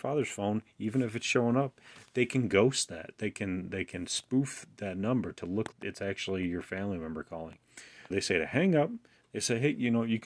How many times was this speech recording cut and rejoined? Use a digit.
2